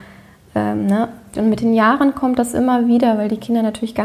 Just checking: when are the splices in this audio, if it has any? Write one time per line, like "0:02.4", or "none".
0:01.3